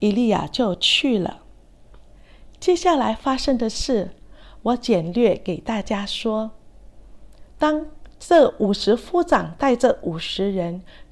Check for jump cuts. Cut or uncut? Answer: cut